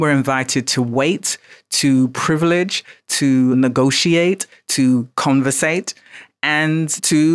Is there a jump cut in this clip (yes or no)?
yes